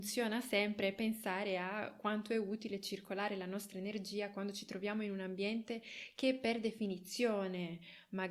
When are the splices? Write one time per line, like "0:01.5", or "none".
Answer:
none